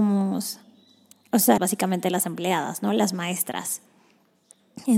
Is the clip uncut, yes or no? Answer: no